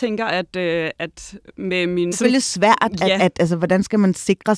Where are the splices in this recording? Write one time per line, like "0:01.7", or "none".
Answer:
0:02.1